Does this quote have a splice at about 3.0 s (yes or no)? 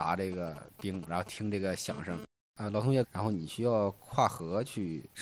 yes